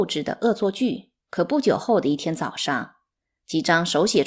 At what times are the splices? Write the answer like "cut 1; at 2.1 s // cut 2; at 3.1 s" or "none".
cut 1; at 1.2 s